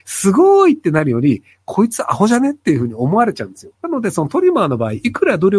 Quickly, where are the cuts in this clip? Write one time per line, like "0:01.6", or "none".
0:03.7